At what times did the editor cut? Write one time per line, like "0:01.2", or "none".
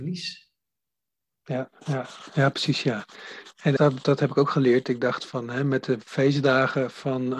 0:03.8